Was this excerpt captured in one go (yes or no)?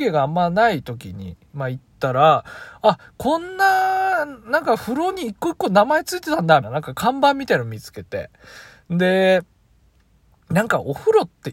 no